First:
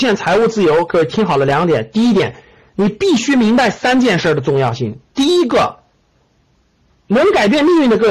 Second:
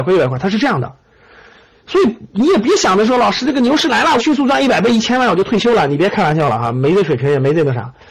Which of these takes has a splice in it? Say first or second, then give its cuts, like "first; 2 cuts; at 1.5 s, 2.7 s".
second; 1 cut; at 4.2 s